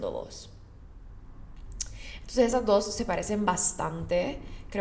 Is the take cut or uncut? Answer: uncut